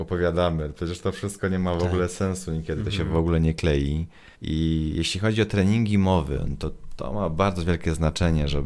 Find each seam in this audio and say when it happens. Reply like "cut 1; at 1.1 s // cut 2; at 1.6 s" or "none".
cut 1; at 4.3 s